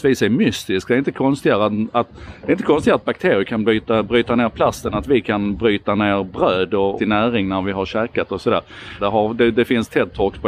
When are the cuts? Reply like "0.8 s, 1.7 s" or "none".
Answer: 7.0 s, 9.0 s